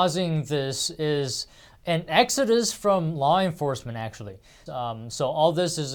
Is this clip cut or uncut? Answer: cut